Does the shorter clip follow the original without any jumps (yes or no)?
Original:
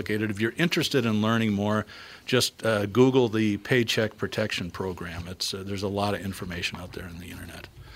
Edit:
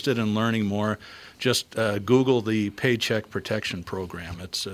yes